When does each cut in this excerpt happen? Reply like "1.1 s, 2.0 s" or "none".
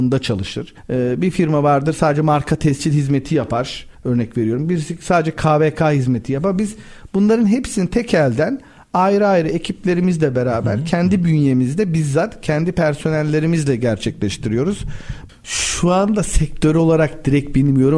15.3 s